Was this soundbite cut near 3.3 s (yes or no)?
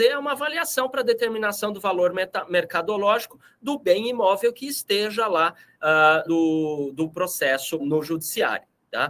no